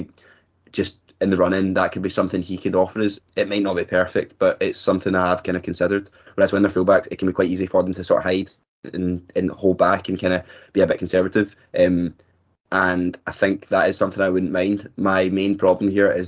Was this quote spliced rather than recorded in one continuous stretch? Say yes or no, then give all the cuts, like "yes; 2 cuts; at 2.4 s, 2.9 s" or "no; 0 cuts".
yes; 2 cuts; at 3.2 s, 6.3 s